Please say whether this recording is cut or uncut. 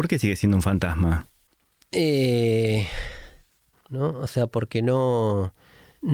cut